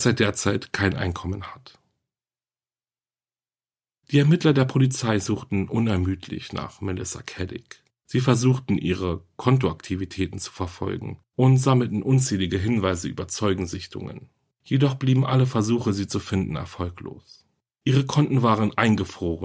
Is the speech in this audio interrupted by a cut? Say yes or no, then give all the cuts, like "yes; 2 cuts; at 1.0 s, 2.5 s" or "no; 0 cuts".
no; 0 cuts